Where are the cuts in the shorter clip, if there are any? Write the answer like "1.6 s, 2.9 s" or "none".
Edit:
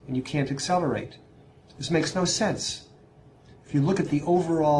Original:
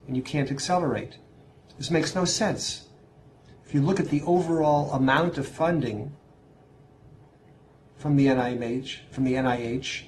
none

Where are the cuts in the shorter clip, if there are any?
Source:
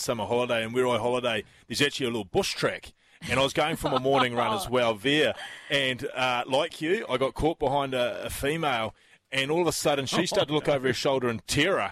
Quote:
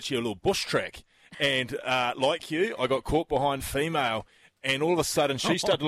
1.3 s, 3.6 s

